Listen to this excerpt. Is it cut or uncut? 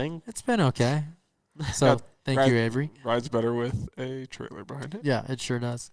uncut